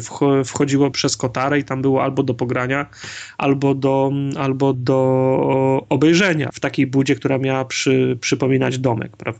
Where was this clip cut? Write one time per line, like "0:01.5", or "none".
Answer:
0:00.9
0:04.7
0:06.5